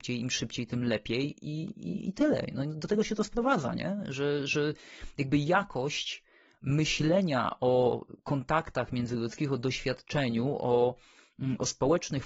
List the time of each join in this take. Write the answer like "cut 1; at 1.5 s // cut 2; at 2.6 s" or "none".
none